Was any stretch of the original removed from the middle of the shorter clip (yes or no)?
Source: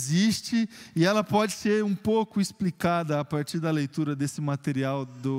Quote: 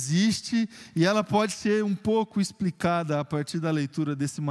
no